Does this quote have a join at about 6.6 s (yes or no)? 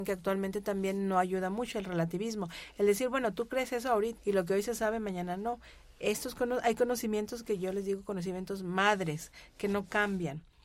no